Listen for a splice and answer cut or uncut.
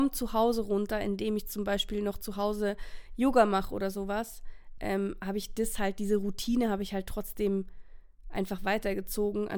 uncut